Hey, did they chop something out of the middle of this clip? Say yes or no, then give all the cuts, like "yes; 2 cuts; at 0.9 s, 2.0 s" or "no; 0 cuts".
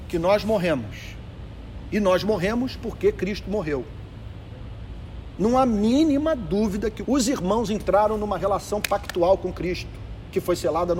yes; 1 cut; at 7.1 s